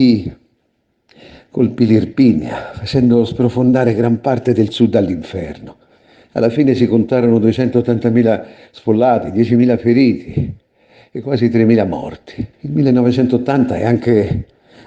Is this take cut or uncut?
cut